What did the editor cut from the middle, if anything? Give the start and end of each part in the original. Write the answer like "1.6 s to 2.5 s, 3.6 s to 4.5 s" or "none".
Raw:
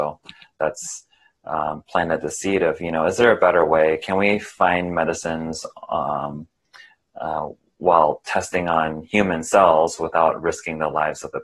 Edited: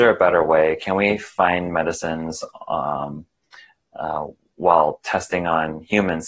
none